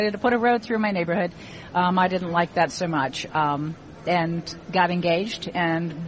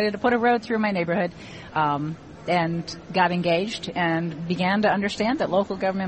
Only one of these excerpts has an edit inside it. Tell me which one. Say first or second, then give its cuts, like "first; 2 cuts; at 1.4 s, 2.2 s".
second; 1 cut; at 1.7 s